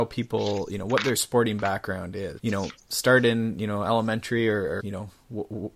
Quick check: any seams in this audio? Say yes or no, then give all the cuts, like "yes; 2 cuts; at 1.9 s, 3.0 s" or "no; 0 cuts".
yes; 2 cuts; at 2.4 s, 4.8 s